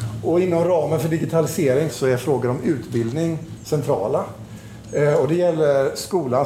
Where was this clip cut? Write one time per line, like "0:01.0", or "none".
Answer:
0:01.9